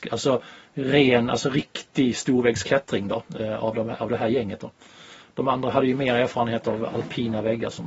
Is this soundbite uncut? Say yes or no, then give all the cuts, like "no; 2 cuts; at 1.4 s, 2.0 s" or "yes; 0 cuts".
yes; 0 cuts